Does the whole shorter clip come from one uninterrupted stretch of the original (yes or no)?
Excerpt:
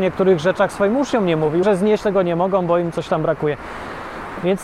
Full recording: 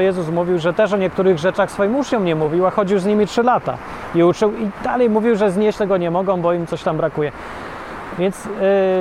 no